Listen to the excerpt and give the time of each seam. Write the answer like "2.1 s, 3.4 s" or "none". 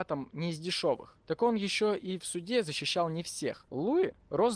3.7 s